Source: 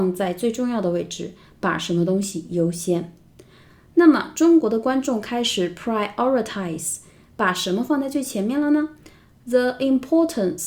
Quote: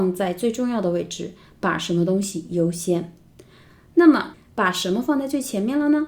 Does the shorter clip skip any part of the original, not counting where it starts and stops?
yes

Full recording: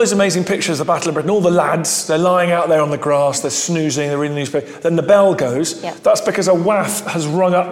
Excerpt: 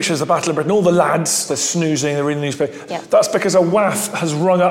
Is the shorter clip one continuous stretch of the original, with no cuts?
no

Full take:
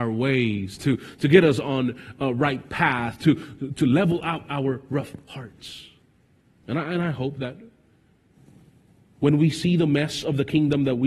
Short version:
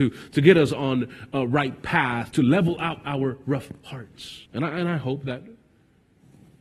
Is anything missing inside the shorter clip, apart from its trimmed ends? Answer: yes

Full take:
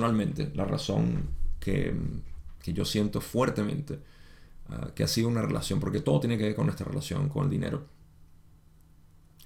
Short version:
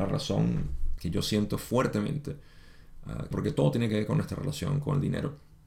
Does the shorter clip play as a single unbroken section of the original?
no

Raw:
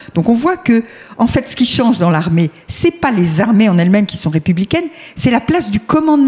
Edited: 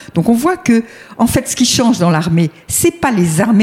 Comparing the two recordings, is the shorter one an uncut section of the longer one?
yes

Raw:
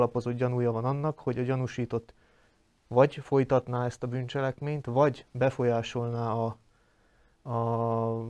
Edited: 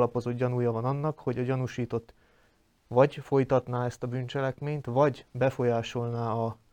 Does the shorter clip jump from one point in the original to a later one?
no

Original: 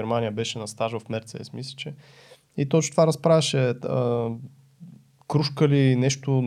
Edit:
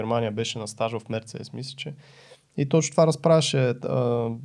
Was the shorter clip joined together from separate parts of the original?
no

